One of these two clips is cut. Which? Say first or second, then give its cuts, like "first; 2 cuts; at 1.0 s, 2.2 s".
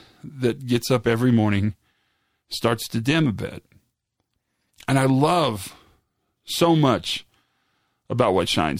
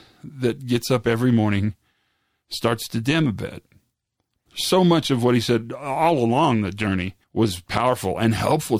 second; 2 cuts; at 4.5 s, 7.2 s